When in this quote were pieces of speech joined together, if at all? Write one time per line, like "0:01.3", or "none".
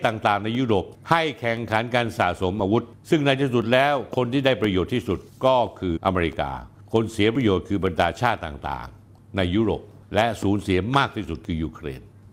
0:06.0